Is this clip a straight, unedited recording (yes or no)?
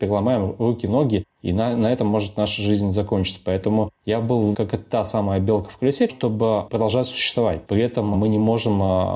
no